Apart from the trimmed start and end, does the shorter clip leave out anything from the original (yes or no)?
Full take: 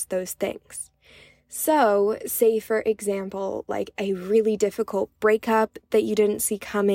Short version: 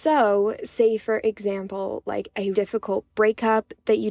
yes